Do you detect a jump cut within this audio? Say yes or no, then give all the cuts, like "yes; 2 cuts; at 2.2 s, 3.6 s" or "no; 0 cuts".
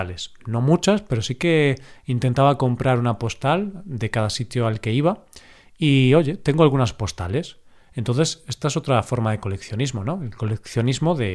no; 0 cuts